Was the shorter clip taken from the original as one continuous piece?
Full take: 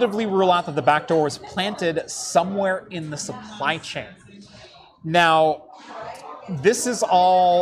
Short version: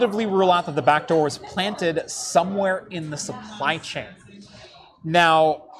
yes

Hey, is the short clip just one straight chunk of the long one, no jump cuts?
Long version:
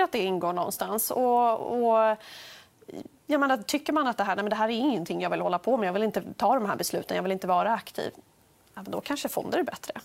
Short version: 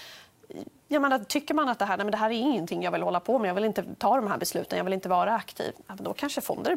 no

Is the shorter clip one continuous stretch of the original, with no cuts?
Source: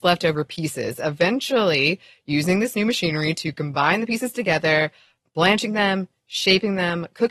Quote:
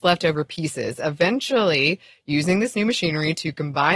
yes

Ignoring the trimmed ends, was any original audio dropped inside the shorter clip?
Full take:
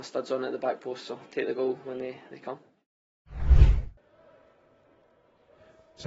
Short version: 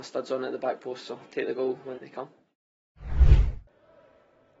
yes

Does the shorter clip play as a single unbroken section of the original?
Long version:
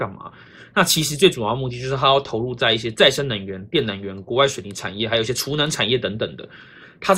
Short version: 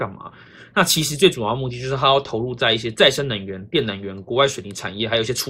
yes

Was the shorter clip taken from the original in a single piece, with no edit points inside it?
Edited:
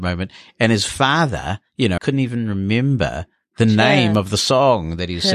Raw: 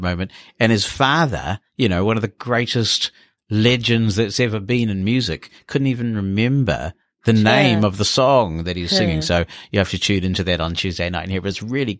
no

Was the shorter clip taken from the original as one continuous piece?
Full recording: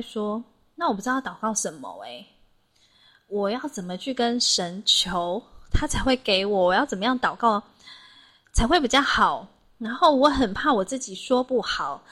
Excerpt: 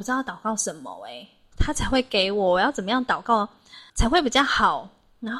no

